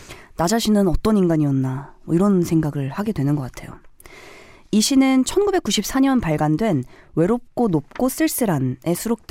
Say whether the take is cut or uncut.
uncut